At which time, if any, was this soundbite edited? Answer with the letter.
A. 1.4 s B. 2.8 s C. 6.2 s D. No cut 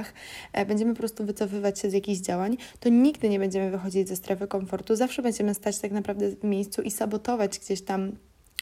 D